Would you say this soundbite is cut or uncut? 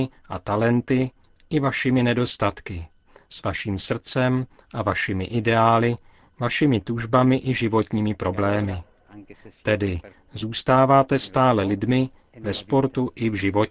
cut